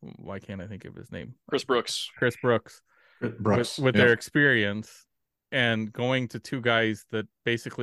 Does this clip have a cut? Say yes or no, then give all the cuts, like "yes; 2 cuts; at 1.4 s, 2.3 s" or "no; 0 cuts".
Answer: no; 0 cuts